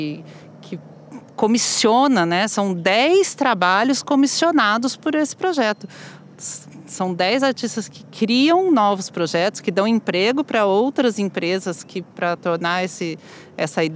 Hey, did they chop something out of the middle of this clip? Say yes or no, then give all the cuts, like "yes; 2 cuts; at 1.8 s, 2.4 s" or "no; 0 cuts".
no; 0 cuts